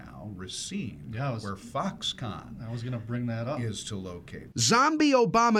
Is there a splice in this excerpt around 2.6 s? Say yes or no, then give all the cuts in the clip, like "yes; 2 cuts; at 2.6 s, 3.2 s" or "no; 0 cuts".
no; 1 cut; at 4.5 s